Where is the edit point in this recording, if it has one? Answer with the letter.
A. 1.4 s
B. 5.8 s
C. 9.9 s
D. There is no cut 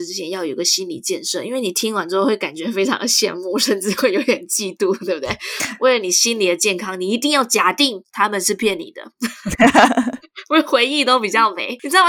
C